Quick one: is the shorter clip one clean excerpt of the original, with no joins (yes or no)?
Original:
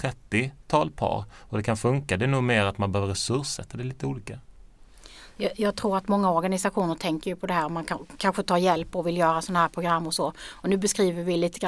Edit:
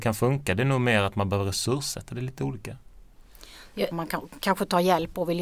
no